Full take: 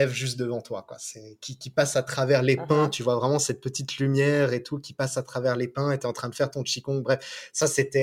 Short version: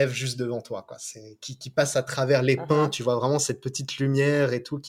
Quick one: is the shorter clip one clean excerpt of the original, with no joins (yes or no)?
yes